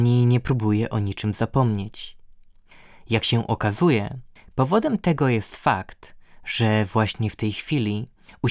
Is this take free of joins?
yes; 0 cuts

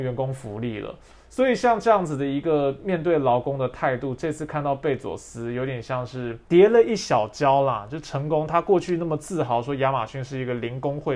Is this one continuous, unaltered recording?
no; 1 cut; at 6.4 s

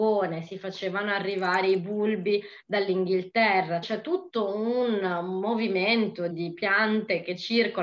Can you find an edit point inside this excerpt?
yes; 2 cuts; at 3.8 s, 6.3 s

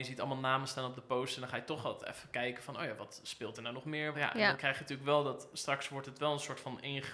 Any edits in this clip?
yes; 1 cut; at 4.1 s

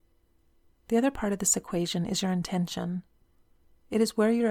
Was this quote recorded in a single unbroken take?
yes; 0 cuts

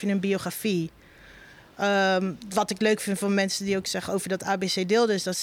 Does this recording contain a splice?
no; 0 cuts

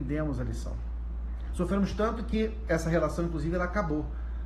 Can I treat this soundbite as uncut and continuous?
no; 1 cut; at 1.5 s

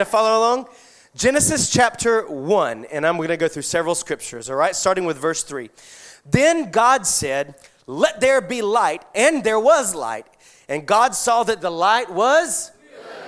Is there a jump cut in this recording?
no; 0 cuts

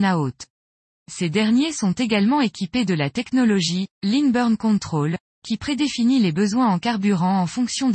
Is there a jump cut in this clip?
no; 0 cuts

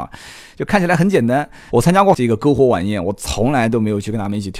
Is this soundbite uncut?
no; 1 cut; at 1.7 s

